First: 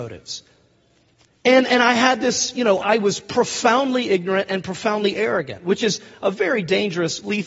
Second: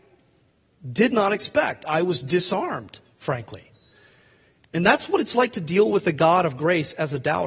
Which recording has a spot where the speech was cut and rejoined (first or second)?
first